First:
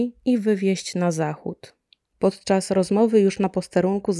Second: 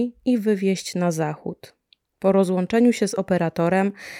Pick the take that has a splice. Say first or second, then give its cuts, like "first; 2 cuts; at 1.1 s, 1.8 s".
first; 1 cut; at 2.1 s